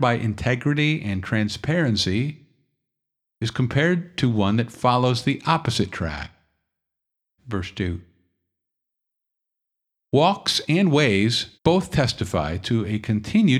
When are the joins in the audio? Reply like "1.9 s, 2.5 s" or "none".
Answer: 7.4 s, 11.6 s